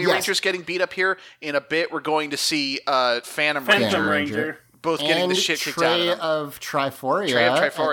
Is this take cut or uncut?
cut